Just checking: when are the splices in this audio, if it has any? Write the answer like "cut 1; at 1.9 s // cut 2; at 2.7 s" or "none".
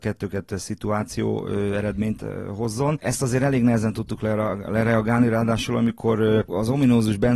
none